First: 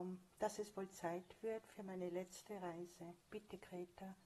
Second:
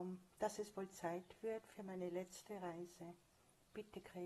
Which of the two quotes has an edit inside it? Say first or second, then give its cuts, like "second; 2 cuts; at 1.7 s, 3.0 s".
first; 1 cut; at 3.2 s